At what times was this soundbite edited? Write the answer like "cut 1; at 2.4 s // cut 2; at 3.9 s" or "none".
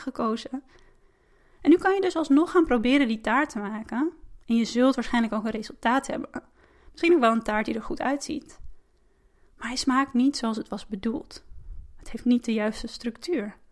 none